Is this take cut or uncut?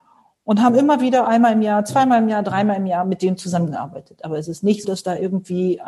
cut